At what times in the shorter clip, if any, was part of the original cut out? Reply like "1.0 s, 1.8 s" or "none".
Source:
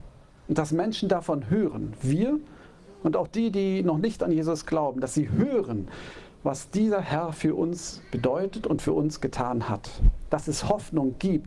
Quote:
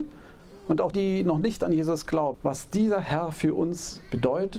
0.9 s, 2.3 s